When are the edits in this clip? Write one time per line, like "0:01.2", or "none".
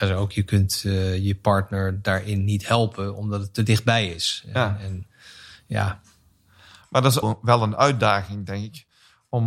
0:07.2